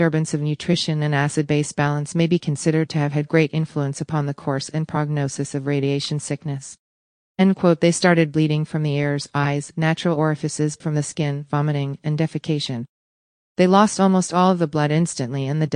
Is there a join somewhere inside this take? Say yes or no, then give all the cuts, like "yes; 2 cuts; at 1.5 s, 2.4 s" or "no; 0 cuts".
yes; 1 cut; at 10.8 s